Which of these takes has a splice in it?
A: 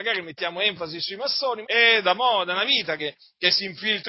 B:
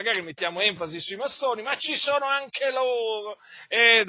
A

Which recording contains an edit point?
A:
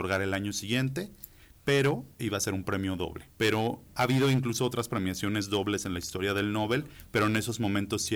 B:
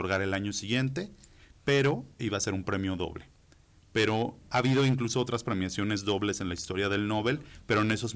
A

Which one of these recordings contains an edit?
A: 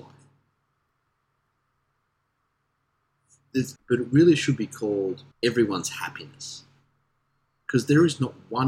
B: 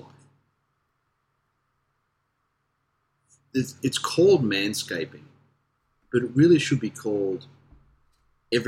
A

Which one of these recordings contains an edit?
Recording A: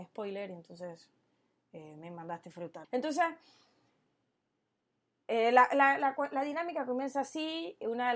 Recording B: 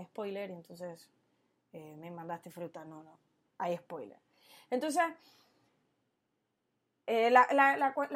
A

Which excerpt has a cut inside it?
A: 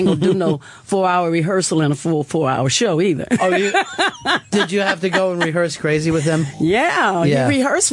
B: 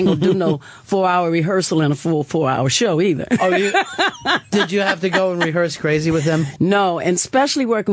B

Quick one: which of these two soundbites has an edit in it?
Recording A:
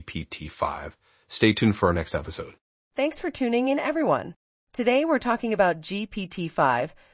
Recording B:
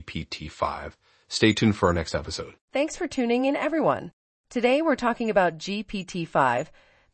B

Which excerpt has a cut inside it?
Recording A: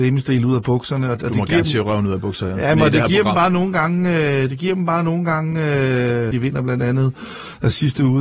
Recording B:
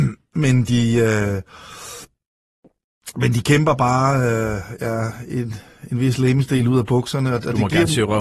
A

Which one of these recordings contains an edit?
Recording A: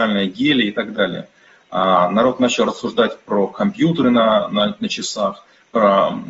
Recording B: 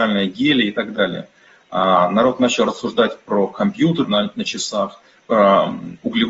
B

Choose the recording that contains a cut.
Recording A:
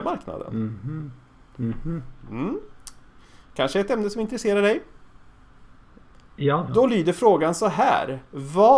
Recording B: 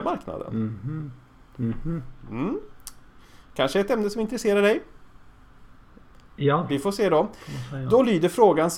A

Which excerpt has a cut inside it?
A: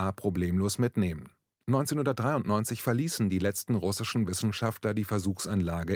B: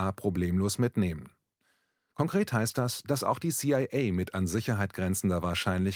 A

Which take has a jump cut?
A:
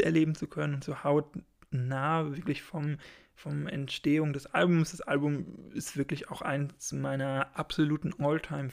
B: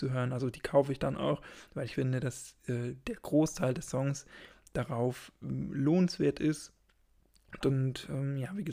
B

